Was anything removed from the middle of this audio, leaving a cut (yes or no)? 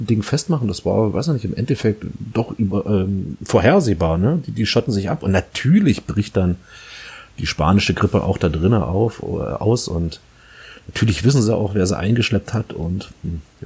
no